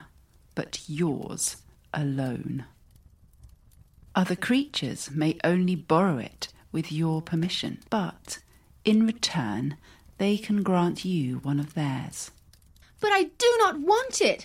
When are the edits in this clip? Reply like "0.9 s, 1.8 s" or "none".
7.9 s